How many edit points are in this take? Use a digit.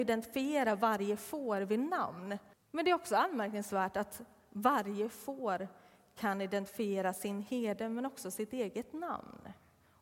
1